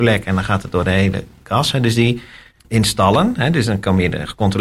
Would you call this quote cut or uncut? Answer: uncut